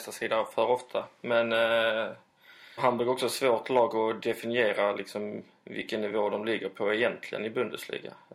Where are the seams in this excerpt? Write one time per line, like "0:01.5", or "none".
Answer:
0:02.8